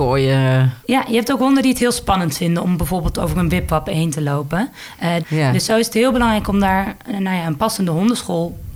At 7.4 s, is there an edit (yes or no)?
no